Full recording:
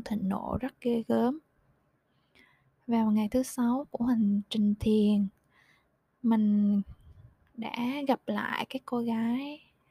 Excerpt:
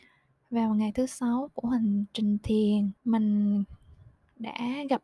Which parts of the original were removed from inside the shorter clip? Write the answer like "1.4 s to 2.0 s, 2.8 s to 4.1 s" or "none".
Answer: 5.3 s to 6.2 s